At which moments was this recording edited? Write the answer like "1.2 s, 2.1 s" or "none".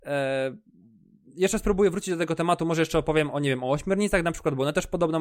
none